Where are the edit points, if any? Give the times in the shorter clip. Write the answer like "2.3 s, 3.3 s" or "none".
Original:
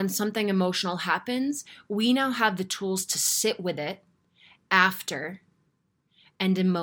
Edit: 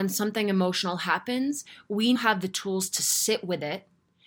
2.2 s